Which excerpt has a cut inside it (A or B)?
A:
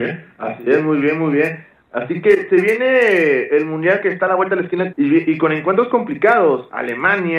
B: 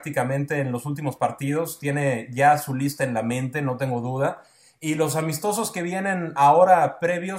A